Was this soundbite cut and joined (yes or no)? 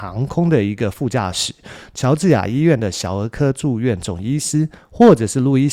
no